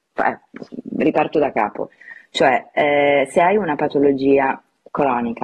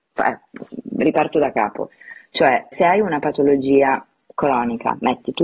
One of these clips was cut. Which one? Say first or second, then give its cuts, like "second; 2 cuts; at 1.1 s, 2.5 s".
second; 1 cut; at 2.7 s